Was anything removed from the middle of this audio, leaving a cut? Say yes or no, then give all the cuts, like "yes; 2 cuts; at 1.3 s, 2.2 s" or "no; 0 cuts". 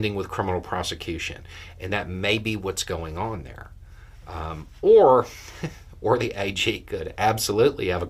no; 0 cuts